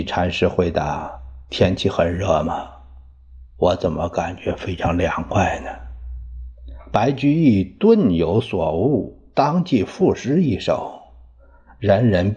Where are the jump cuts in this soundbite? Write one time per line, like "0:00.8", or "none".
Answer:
none